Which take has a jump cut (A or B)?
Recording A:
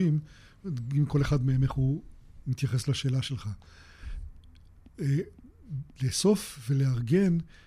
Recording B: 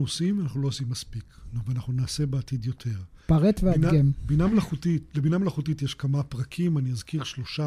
A